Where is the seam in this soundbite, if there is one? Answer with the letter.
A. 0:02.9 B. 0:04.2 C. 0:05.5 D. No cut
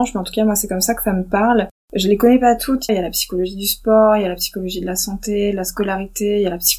A